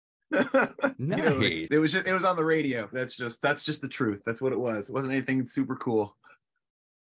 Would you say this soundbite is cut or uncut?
cut